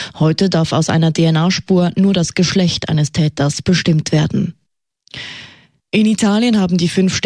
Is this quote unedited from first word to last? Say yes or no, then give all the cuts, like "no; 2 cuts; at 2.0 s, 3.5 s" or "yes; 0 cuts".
yes; 0 cuts